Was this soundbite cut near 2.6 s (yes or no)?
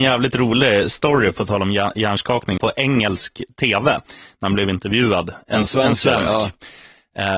yes